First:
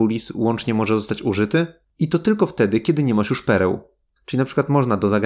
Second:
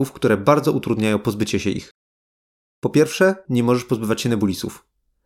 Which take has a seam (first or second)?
second